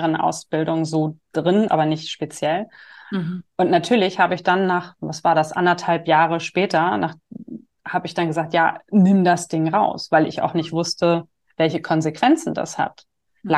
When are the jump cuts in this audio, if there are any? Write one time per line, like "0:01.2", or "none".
0:01.7
0:03.5